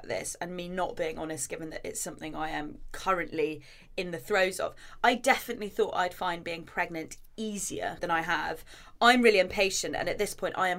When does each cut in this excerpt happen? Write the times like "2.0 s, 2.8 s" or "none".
8.0 s